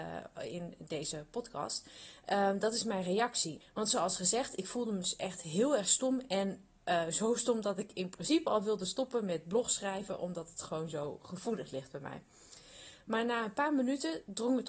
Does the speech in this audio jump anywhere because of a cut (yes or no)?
yes